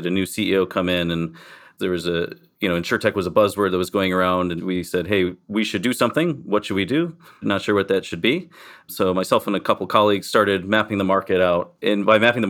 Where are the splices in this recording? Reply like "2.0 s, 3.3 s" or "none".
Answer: 4.6 s

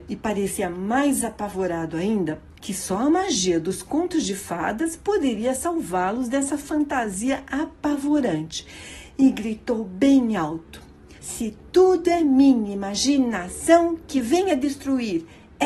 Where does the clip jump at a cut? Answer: 2.6 s, 11.2 s

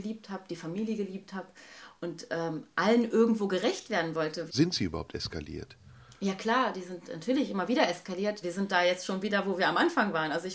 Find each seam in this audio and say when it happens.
4.5 s, 8.4 s

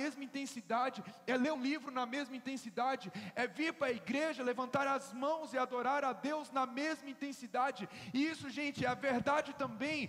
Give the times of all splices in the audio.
1.5 s

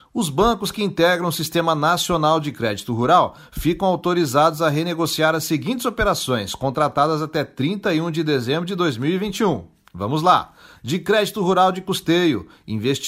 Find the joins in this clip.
none

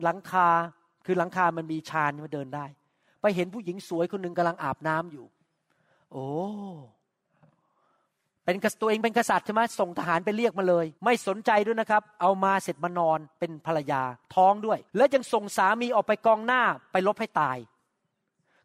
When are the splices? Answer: 10.9 s, 14.9 s

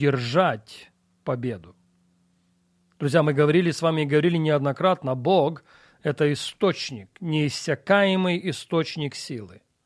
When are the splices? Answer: none

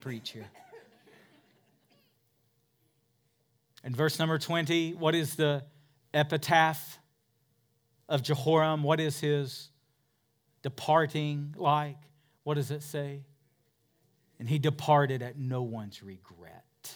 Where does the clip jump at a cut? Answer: none

